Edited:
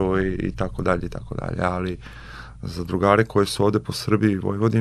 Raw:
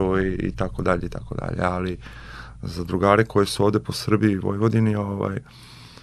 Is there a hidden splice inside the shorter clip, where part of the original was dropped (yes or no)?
no